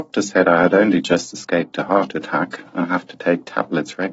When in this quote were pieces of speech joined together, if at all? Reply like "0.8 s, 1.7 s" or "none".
2.8 s

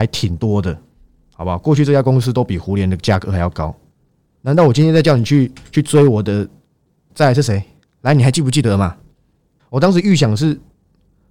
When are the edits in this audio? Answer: 4.3 s, 7.1 s, 9.6 s

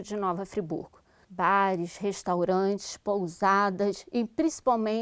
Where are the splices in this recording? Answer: 1.2 s

